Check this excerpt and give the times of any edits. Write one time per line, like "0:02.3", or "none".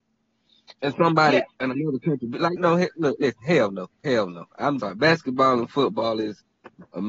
0:02.6
0:04.8

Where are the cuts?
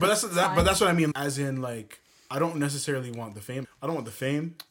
0:01.1
0:03.6

